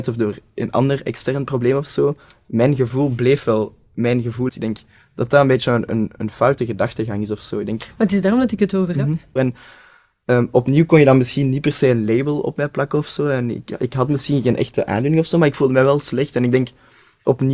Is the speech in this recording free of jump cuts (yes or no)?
no